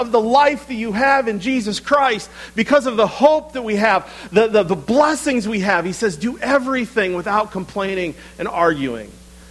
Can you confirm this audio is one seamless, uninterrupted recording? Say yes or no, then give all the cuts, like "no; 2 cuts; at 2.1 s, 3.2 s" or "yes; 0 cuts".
yes; 0 cuts